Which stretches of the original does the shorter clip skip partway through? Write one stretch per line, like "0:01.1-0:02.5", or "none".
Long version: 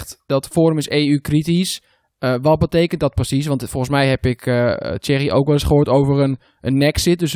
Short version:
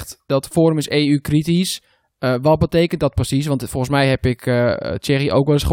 none